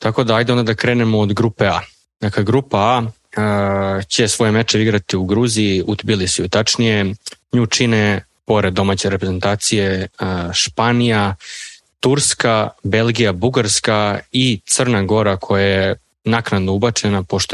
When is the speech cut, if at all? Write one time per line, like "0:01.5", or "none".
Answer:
none